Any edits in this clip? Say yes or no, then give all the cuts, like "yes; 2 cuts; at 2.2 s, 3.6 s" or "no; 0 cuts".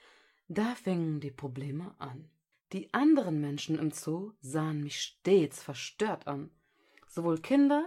yes; 1 cut; at 2.5 s